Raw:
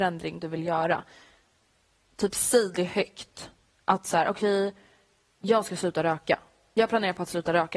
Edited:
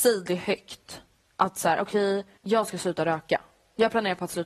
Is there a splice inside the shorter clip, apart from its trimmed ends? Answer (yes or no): yes